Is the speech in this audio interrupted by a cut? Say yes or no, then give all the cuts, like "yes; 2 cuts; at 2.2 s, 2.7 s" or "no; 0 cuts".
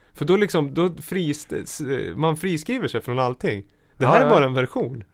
no; 0 cuts